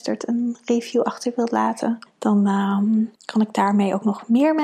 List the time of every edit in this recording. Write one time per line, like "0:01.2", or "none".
0:02.1
0:03.2

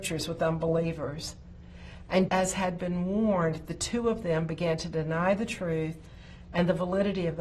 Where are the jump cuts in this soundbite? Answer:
0:02.3

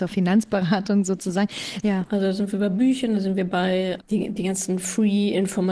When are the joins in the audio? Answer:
0:01.8
0:04.0

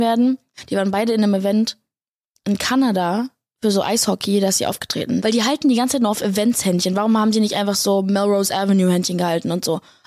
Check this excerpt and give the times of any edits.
0:05.2

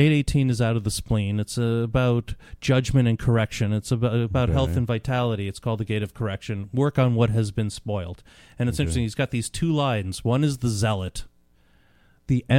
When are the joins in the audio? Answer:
none

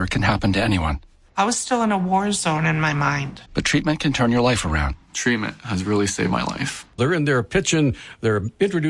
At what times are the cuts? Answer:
0:03.5
0:07.0

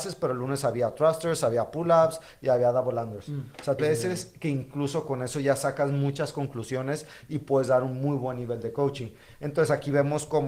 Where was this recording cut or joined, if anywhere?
0:03.8

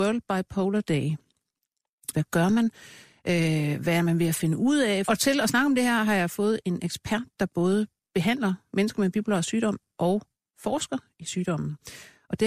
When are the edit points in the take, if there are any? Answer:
0:02.1
0:05.1

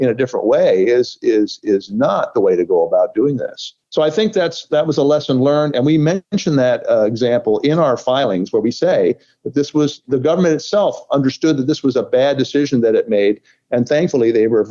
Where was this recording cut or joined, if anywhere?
0:03.8

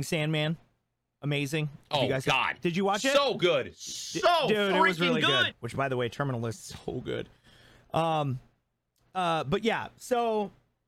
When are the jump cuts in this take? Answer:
0:05.5

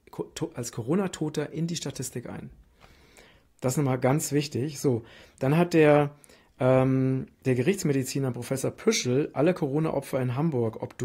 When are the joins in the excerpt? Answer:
none

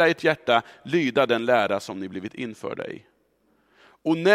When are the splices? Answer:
none

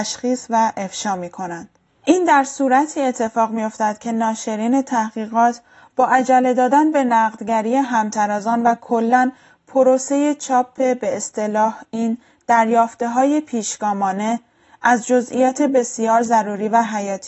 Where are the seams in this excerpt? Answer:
none

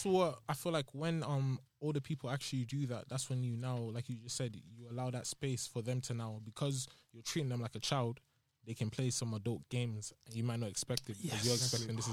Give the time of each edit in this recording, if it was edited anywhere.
none

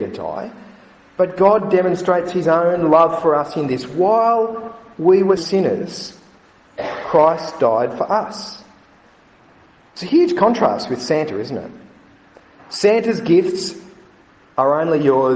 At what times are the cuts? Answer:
0:05.4

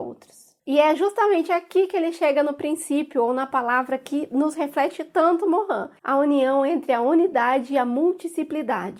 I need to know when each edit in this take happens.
0:06.0

